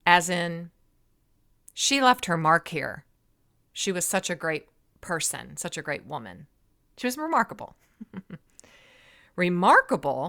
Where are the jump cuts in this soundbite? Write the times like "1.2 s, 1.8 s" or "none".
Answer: none